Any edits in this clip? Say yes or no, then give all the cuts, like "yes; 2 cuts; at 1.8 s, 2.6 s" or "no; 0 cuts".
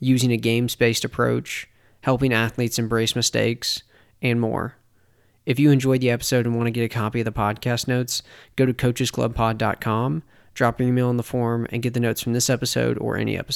no; 0 cuts